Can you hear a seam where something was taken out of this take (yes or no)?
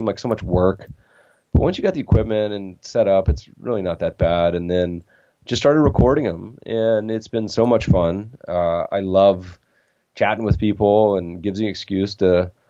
no